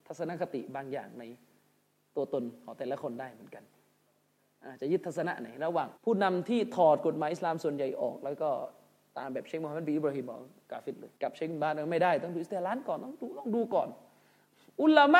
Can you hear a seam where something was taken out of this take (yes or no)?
yes